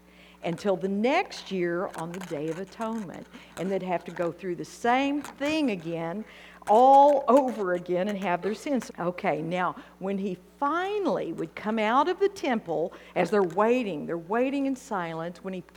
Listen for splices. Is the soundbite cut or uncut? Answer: cut